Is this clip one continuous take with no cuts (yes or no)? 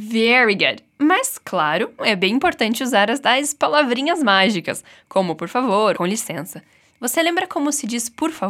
no